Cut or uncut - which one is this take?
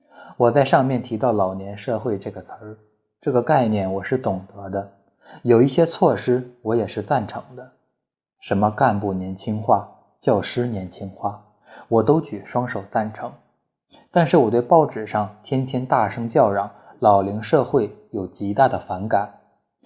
uncut